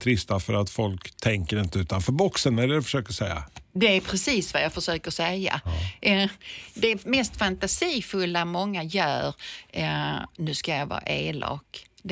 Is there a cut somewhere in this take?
no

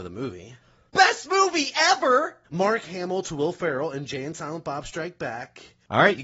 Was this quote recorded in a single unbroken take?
no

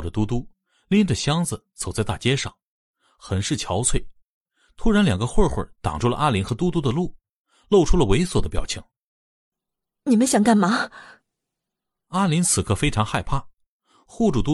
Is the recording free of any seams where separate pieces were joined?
yes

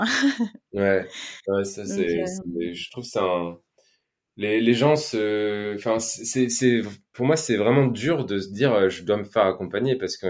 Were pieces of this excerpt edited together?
no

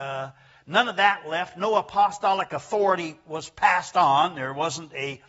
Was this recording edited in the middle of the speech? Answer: no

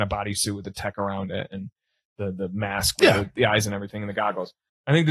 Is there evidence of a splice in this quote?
no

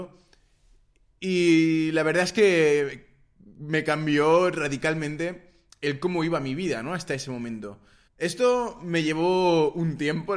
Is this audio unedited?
no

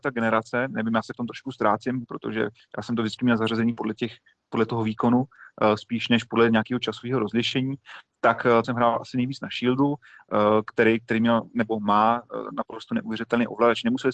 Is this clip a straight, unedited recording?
no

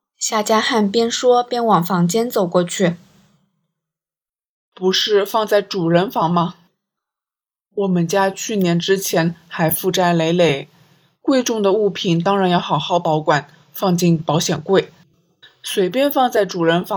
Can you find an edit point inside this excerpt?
no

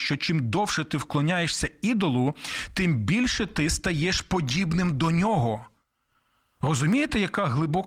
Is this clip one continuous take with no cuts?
yes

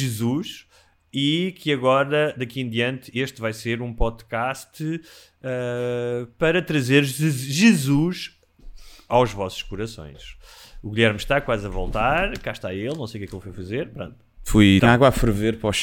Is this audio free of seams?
no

